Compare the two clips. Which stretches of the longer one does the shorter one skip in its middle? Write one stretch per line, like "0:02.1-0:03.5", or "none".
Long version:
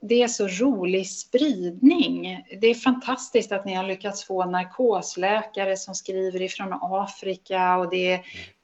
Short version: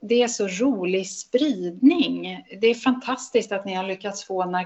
none